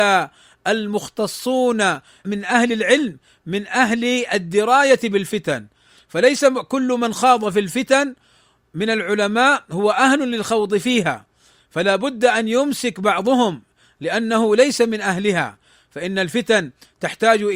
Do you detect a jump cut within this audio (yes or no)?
no